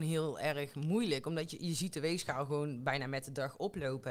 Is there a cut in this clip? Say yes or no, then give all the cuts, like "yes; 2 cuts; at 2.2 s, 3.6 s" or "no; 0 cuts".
no; 0 cuts